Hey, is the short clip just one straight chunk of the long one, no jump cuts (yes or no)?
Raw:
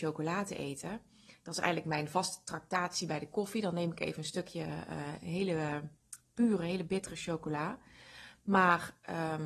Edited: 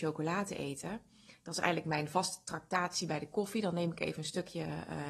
yes